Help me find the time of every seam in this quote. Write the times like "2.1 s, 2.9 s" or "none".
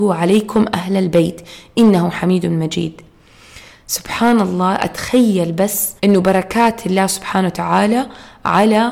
6.0 s